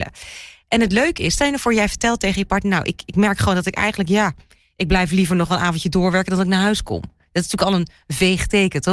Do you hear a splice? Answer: no; 0 cuts

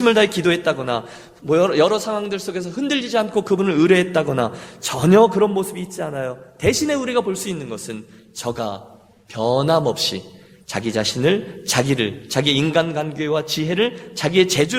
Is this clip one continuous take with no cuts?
yes; 0 cuts

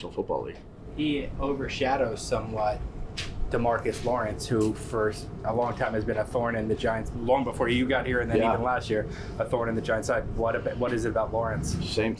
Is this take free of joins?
yes; 0 cuts

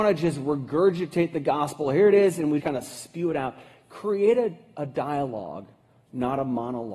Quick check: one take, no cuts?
no; 1 cut; at 2.6 s

